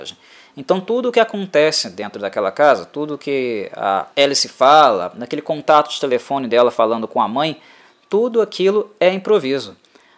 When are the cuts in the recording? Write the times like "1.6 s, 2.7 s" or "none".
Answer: 4.1 s